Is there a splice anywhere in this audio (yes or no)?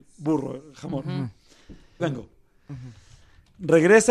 yes